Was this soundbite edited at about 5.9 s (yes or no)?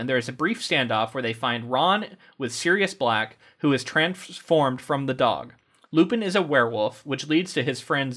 yes